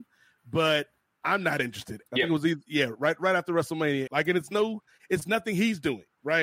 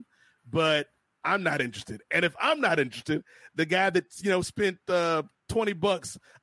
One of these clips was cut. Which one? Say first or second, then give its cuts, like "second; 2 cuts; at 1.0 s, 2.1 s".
first; 2 cuts; at 2.1 s, 4.1 s